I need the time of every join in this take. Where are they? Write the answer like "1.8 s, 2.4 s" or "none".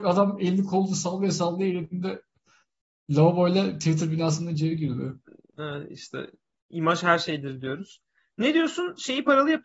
none

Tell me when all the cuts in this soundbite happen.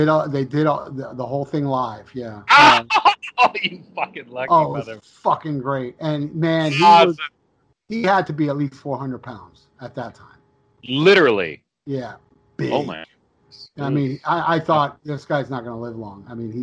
none

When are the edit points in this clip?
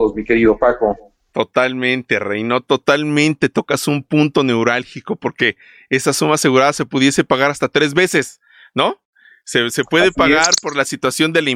none

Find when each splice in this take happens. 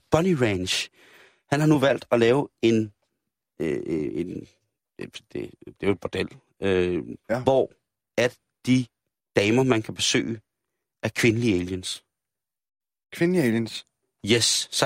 7.2 s

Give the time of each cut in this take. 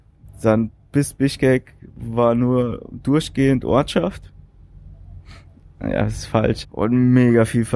6.6 s

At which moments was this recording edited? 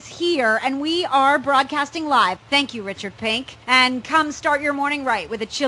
2.4 s, 3.6 s

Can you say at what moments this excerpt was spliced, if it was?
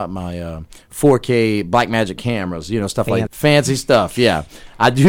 3.3 s

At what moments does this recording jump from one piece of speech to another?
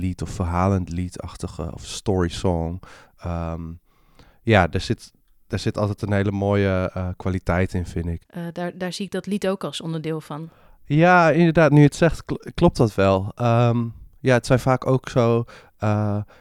8.2 s

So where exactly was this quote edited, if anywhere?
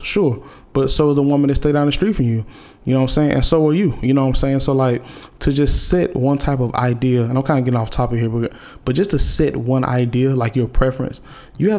none

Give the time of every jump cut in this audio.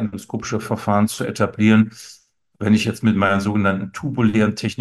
none

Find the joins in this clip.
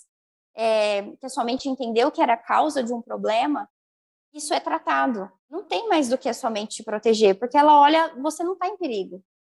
5.4 s

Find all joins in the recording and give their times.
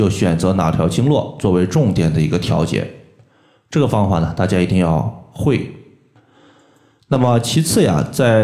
none

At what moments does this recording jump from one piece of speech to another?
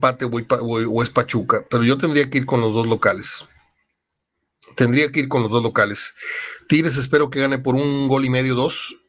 none

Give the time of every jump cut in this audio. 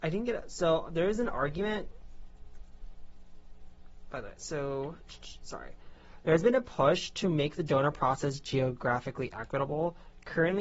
none

